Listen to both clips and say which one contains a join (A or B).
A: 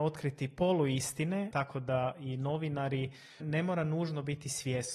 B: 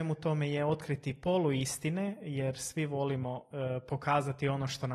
A